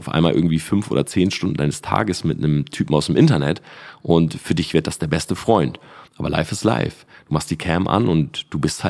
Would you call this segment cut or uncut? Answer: cut